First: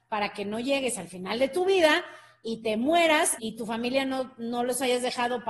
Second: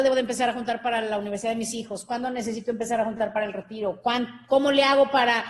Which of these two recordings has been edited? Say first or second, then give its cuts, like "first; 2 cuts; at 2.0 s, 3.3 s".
first; 1 cut; at 3.4 s